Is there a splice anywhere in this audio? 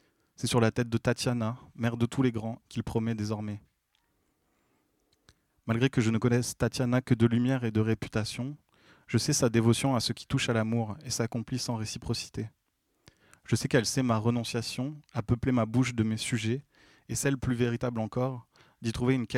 yes; 1 cut; at 2.6 s

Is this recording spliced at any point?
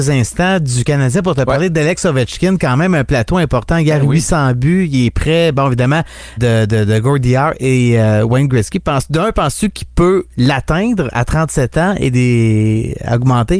yes; 1 cut; at 6.4 s

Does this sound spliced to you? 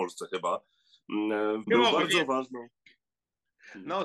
yes; 1 cut; at 1.6 s

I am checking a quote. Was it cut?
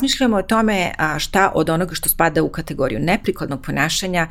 no; 0 cuts

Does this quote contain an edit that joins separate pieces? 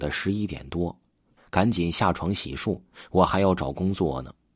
yes; 1 cut; at 1.4 s

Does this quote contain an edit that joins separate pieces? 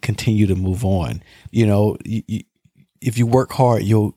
yes; 1 cut; at 1.5 s

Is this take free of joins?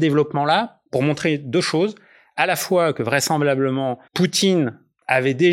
no; 1 cut; at 4.1 s

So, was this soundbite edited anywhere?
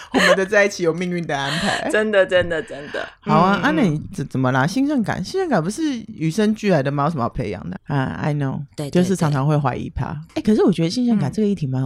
yes; 2 cuts; at 7.8 s, 10.3 s

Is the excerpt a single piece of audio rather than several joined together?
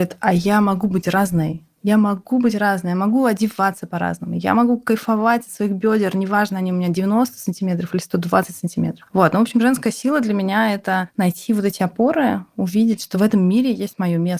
no; 1 cut; at 9.1 s

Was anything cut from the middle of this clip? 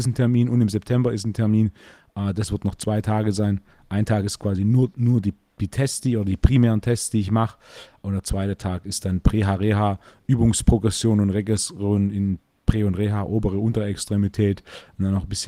no; 0 cuts

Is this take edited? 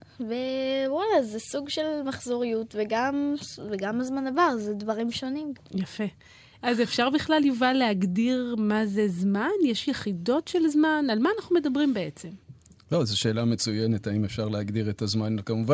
no; 0 cuts

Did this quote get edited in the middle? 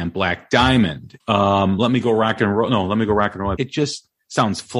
yes; 2 cuts; at 1.2 s, 3.5 s

